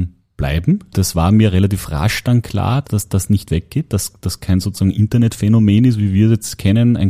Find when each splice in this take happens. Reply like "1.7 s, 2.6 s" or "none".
0.9 s, 2.8 s